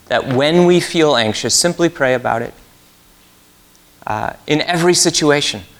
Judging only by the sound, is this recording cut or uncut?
uncut